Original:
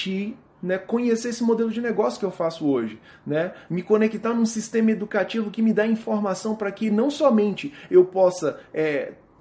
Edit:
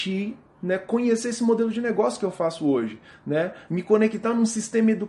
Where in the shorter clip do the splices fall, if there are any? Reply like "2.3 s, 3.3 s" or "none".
none